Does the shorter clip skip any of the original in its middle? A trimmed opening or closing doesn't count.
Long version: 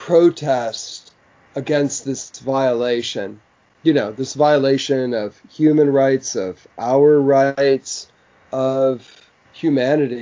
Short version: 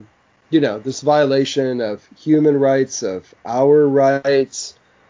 no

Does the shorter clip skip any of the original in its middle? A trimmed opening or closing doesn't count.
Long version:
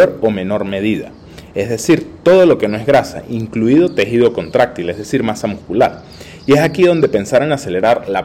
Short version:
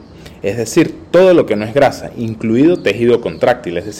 no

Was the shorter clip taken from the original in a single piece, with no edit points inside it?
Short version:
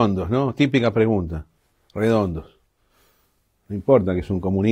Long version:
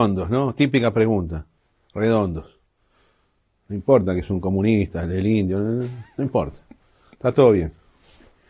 yes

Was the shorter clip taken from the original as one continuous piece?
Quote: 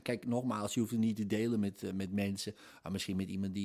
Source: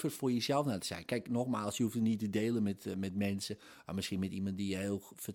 yes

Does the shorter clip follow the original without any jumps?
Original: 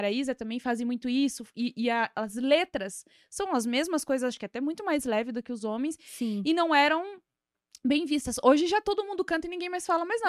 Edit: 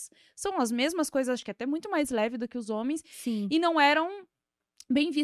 yes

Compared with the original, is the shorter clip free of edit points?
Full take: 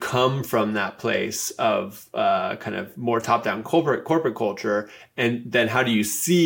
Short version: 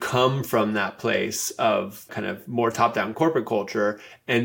no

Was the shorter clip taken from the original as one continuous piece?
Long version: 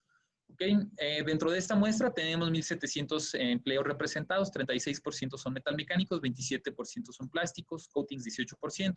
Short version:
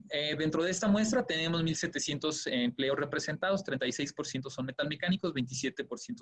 yes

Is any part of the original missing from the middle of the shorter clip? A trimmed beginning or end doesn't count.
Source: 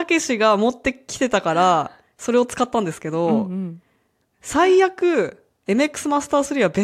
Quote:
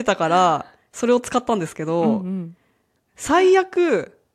no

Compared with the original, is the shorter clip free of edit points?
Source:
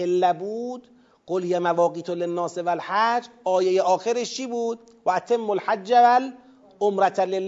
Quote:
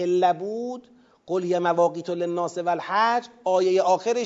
yes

